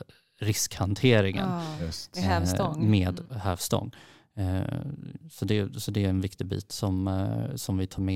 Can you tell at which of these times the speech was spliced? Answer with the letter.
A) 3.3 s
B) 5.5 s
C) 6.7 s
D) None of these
A